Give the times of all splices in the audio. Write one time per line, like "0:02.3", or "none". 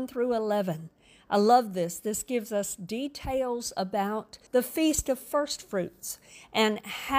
0:04.5